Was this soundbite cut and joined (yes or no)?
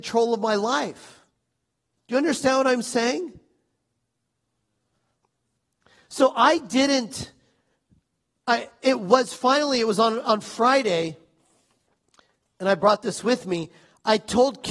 no